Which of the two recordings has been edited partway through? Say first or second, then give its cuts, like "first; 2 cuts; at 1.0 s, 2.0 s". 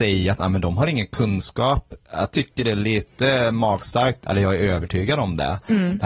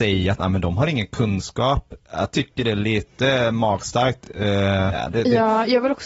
first; 1 cut; at 4.3 s